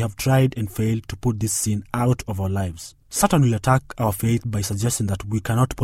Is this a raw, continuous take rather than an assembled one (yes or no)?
no